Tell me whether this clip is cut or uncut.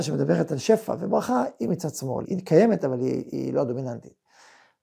cut